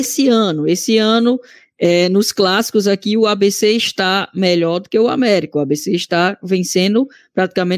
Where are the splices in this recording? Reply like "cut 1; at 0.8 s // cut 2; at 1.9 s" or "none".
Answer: none